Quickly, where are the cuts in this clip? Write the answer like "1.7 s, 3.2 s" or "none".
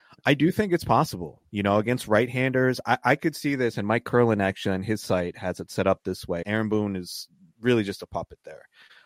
6.4 s

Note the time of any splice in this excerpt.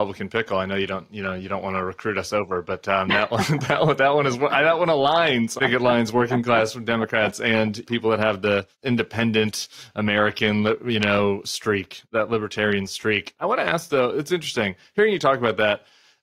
5.6 s

